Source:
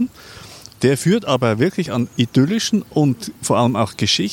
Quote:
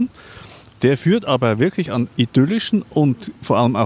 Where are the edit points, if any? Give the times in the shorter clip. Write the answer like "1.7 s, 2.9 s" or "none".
none

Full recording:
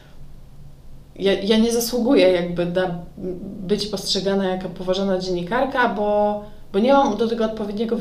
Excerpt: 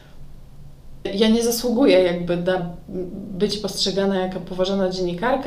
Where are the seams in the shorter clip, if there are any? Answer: 1.0 s

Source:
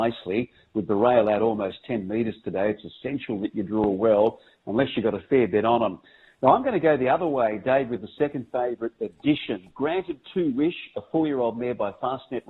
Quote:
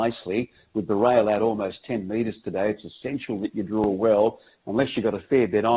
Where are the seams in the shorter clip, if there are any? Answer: none

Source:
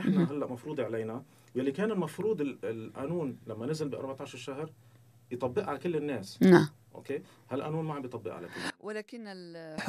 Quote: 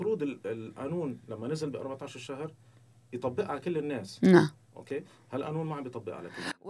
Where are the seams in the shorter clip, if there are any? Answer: none

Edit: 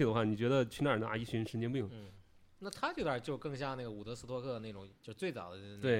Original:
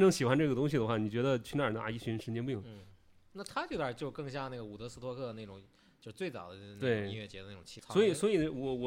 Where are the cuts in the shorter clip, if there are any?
5.0 s

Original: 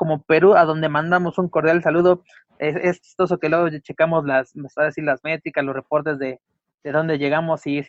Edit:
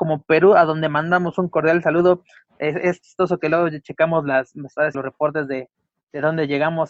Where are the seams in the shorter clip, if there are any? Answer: 4.9 s

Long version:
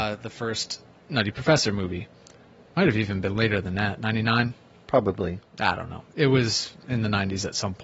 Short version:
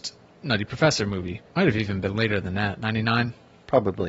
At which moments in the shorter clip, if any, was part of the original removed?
1.5 s

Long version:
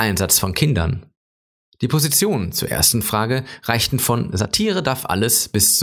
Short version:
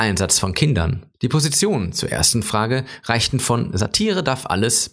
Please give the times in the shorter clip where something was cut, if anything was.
1.1 s

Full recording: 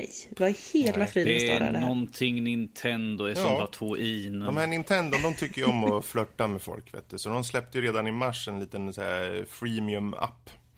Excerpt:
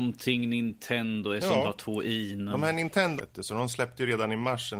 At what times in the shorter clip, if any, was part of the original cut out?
3.2 s

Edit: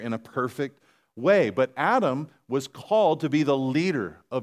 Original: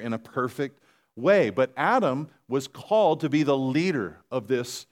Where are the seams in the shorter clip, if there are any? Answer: none

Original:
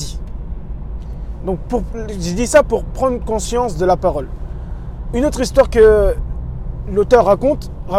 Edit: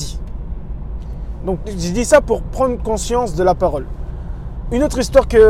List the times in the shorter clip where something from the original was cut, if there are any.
1.6 s

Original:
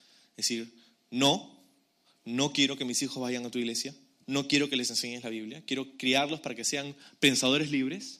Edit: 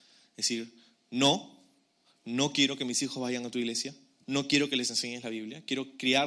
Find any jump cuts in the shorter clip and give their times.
none

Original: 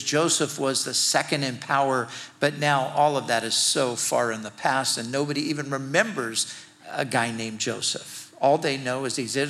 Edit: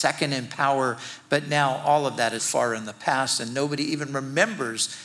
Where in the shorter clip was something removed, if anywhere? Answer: 2.4 s

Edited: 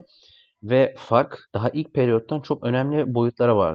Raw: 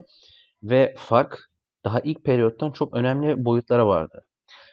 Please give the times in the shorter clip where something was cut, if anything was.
1.4 s

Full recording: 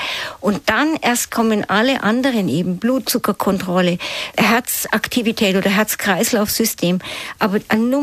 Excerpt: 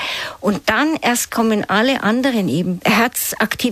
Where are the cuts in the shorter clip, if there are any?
2.8 s

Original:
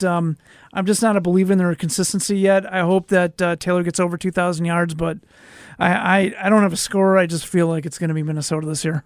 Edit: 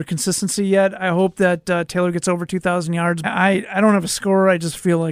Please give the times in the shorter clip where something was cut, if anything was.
3.2 s

